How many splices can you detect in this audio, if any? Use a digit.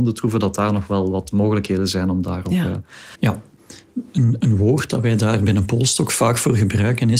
2